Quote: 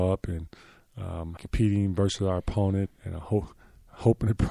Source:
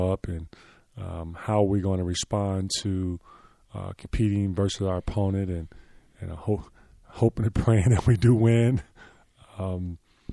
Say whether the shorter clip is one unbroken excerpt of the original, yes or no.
no